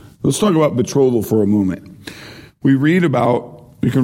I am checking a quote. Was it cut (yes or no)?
no